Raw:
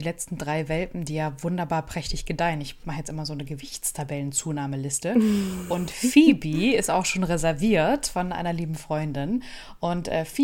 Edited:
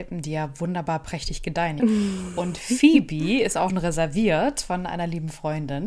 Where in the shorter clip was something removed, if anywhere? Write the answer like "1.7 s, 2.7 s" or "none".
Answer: 1.8 s, 3.7 s